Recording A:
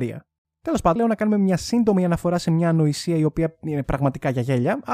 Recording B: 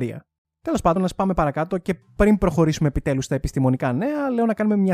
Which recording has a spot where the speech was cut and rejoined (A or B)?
A